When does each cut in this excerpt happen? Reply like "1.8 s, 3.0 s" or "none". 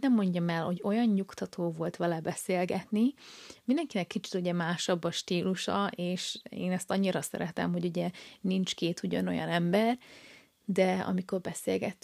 none